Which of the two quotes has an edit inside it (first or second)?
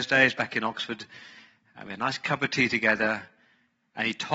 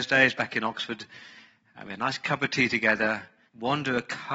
second